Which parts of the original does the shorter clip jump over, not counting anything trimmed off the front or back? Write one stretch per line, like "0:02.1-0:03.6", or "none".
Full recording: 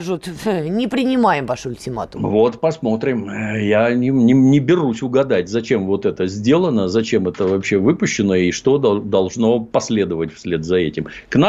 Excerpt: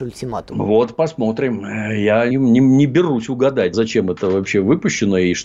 0:03.9-0:04.0
0:05.5-0:06.9